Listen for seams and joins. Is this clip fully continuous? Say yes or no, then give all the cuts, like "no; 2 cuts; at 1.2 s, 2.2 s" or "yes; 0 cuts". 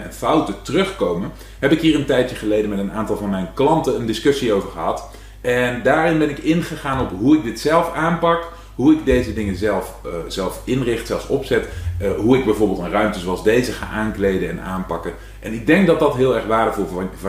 yes; 0 cuts